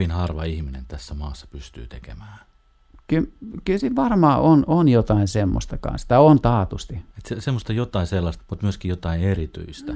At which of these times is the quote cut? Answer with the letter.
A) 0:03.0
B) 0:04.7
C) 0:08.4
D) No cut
C